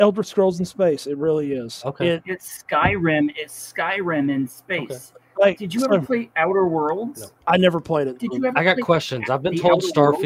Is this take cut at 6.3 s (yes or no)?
yes